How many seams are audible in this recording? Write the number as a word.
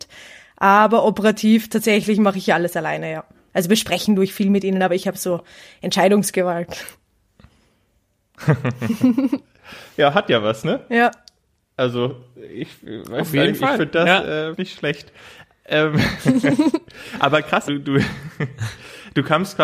two